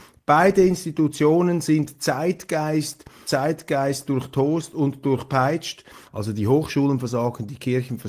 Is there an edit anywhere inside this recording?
yes; 2 cuts; at 3.2 s, 6.0 s

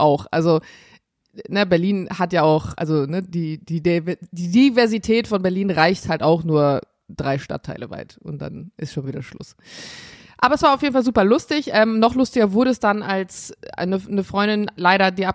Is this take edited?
no; 0 cuts

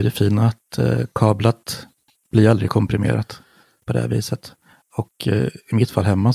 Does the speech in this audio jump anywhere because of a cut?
no; 0 cuts

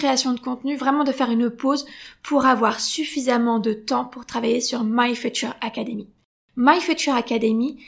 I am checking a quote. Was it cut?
yes; 1 cut; at 6.4 s

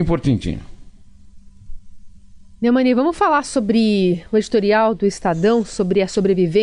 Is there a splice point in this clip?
no; 0 cuts

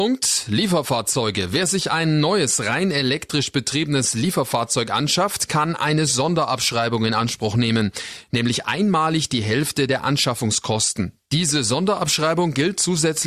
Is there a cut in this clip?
no; 0 cuts

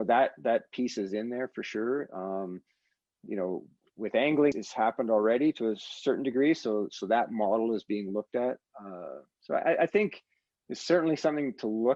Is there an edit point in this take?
yes; 1 cut; at 4.5 s

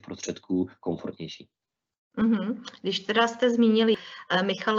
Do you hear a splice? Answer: no; 0 cuts

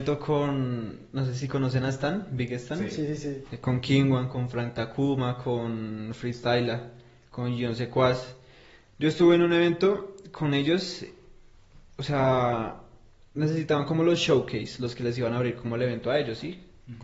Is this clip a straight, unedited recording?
yes; 0 cuts

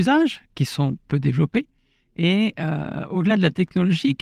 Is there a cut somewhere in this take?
yes; 1 cut; at 1.0 s

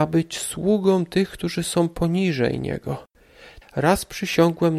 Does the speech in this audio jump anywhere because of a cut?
yes; 1 cut; at 3.6 s

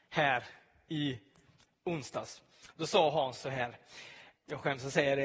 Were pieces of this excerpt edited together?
yes; 1 cut; at 4.3 s

